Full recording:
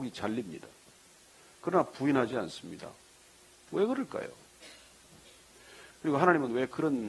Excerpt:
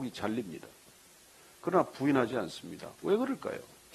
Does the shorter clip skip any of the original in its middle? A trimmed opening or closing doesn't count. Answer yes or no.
yes